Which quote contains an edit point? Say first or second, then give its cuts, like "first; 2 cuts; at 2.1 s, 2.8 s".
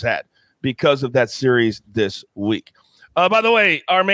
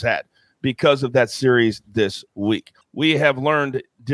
second; 1 cut; at 2.8 s